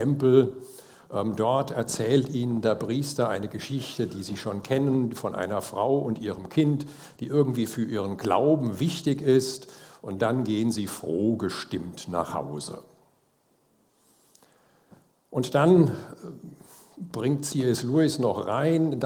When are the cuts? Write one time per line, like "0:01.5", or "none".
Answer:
none